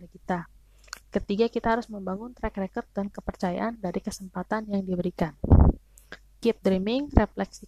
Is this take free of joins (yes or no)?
no